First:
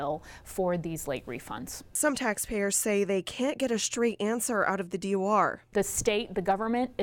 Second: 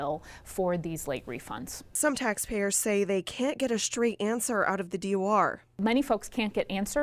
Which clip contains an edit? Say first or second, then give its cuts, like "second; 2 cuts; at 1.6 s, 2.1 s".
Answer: first; 1 cut; at 5.7 s